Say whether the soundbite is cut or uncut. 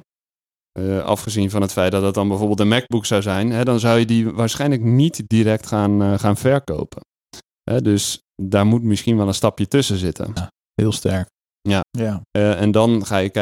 cut